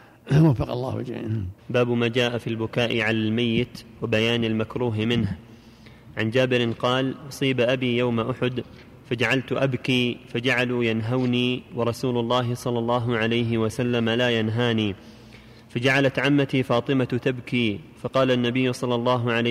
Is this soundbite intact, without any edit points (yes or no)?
no